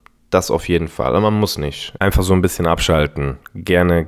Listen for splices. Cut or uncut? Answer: cut